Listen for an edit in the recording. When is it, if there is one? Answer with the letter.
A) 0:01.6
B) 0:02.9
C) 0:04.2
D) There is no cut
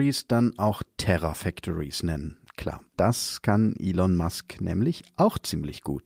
B